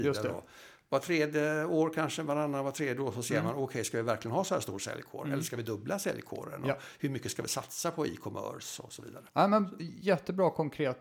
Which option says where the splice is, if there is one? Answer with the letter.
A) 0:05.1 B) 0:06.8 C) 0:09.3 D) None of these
C